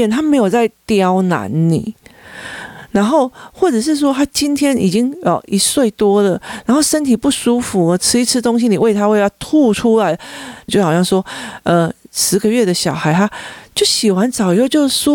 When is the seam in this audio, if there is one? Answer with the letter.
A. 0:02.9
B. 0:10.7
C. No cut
B